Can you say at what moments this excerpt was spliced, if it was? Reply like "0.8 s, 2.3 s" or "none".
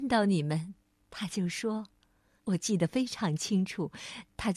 2.4 s